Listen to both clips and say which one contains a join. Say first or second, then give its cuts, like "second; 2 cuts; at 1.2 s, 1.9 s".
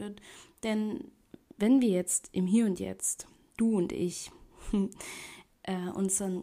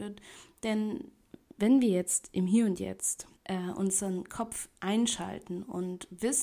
second; 2 cuts; at 3.4 s, 4.8 s